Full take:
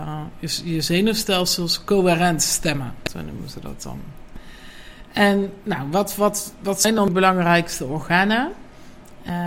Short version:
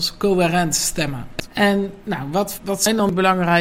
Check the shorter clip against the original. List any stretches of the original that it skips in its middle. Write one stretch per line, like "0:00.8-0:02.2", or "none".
0:03.1-0:05.1
0:06.2-0:06.6